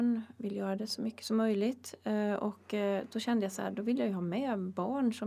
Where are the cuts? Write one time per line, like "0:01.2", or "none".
none